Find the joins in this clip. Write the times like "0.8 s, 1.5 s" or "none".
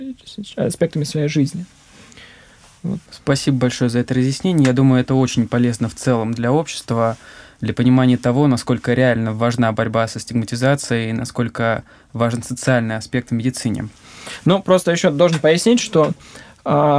3.1 s